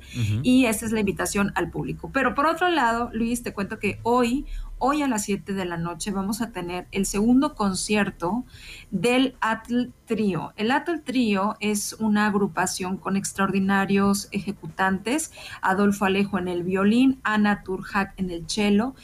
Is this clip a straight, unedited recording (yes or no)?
yes